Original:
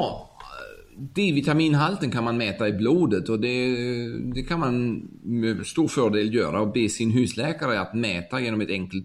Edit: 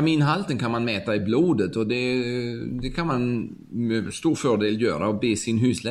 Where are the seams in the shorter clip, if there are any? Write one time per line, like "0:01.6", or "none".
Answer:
none